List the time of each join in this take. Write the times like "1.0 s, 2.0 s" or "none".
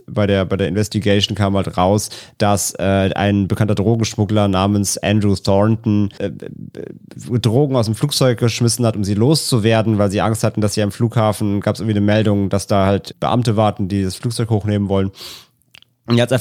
6.2 s, 13.1 s